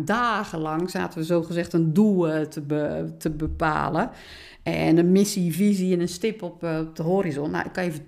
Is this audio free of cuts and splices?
yes; 0 cuts

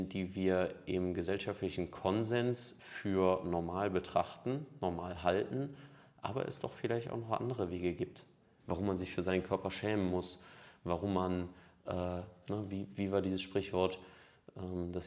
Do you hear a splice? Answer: yes; 1 cut; at 8.6 s

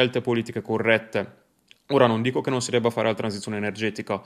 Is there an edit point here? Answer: no; 0 cuts

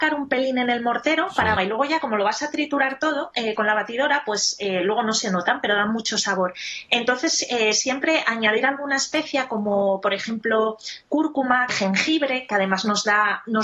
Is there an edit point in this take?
yes; 2 cuts; at 1.6 s, 11.7 s

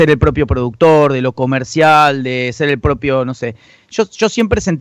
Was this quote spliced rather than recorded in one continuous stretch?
no; 0 cuts

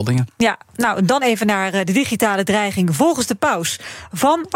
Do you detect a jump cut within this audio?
no; 0 cuts

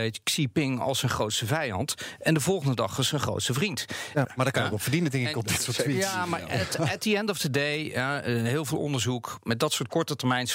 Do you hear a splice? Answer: yes; 1 cut; at 4.2 s

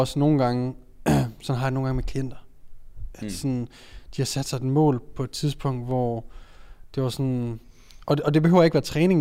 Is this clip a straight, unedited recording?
yes; 0 cuts

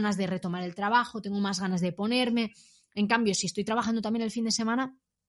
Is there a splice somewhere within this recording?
no; 0 cuts

